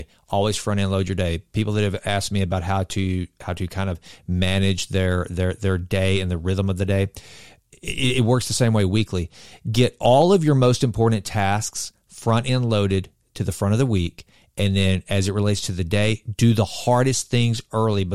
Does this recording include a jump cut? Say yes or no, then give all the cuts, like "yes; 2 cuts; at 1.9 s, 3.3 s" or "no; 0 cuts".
no; 0 cuts